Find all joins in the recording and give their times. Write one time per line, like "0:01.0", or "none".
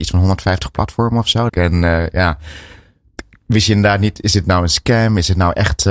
0:01.5